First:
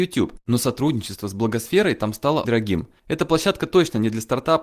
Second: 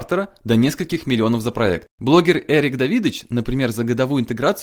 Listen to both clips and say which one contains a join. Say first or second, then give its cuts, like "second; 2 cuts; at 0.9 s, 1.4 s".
first; 1 cut; at 2.4 s